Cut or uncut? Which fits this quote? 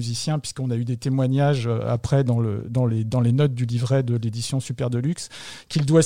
uncut